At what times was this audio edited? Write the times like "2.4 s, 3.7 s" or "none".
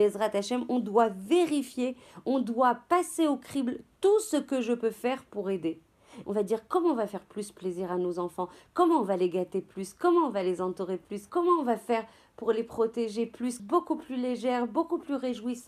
6.2 s, 11.3 s, 13.6 s

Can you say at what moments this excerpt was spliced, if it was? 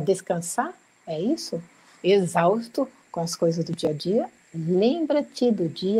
2.0 s, 4.4 s

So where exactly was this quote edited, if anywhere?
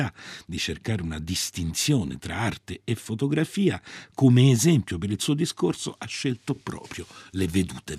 none

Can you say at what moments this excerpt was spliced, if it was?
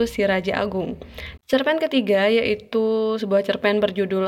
1.4 s

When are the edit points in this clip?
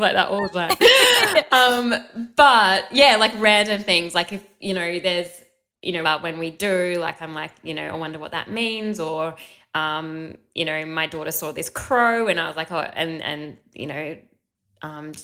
6.0 s

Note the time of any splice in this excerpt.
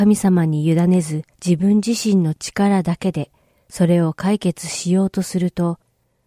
1.3 s

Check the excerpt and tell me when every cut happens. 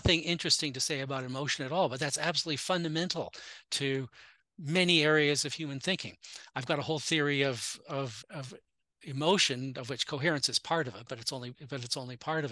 8.2 s

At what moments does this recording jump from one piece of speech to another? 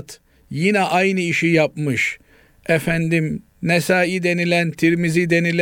none

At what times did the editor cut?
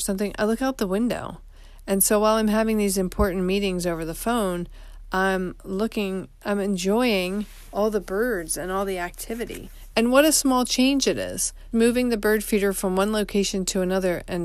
9.9 s, 11.7 s

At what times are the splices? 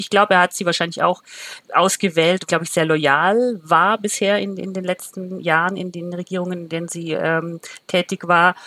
2.5 s

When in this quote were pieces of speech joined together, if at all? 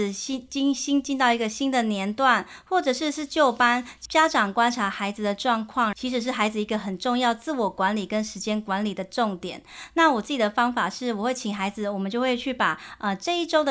5.9 s

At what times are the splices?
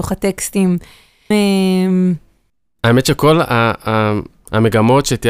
1.3 s

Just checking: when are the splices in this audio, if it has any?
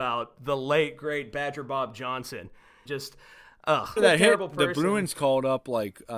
2.9 s, 4.0 s

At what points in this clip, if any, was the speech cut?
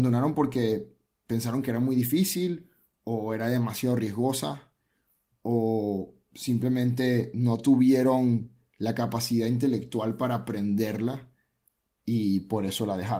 none

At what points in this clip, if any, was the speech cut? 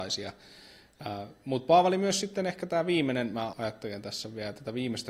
3.5 s

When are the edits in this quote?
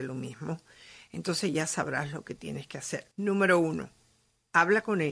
3.1 s

